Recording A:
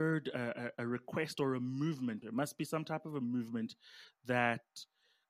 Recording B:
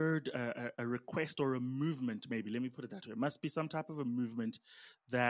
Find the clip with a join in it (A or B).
A